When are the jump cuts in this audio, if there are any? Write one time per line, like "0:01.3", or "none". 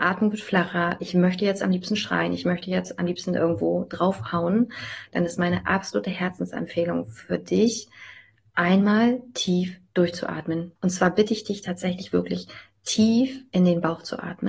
0:10.8

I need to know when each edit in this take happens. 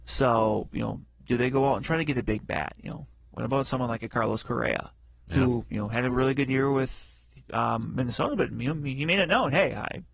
none

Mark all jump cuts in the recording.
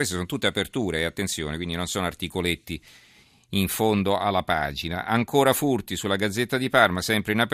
none

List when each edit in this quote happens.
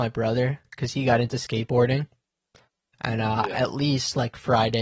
none

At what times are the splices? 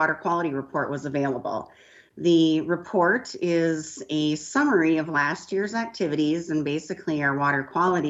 none

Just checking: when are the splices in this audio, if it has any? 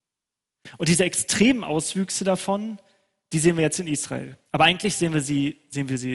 0:04.5

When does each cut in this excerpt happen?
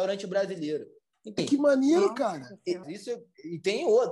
0:01.4
0:02.8

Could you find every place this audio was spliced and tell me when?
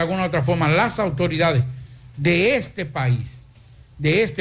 none

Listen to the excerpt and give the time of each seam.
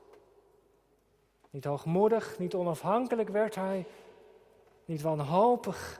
none

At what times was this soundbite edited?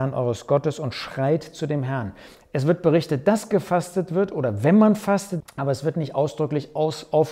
0:02.3
0:05.4

